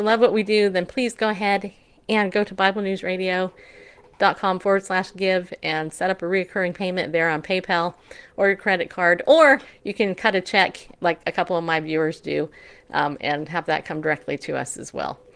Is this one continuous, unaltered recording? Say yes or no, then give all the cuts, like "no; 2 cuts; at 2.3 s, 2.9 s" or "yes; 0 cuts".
yes; 0 cuts